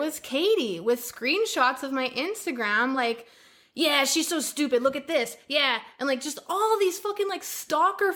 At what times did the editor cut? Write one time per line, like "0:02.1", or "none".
none